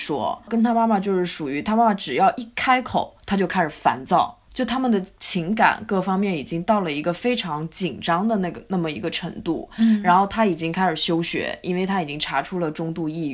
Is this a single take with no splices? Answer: yes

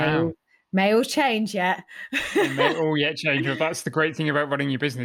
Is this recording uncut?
yes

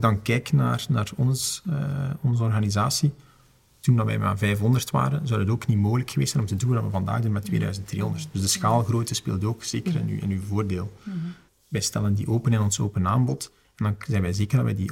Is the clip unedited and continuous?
no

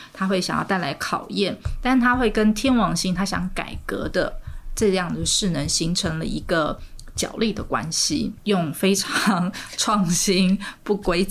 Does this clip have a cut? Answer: yes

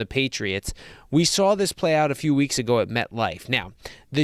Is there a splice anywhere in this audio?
no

